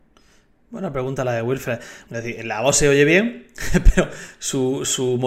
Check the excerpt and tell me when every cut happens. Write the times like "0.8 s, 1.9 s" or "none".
2.1 s